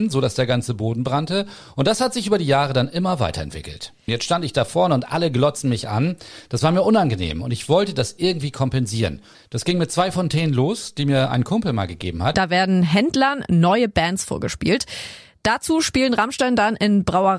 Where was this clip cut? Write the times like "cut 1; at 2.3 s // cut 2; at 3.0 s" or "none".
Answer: cut 1; at 4.1 s // cut 2; at 9.3 s // cut 3; at 12.3 s